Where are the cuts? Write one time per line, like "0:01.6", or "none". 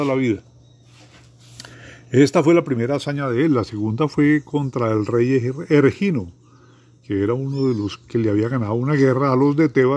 none